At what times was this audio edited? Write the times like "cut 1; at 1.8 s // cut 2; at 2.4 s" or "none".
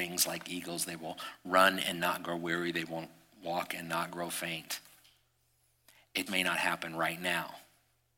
cut 1; at 6.3 s